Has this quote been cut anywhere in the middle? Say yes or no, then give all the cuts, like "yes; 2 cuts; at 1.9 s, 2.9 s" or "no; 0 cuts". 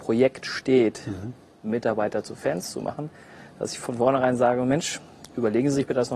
no; 0 cuts